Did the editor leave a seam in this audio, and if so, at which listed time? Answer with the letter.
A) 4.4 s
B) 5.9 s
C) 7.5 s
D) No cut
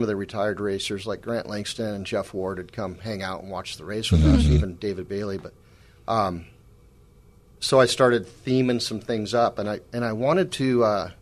D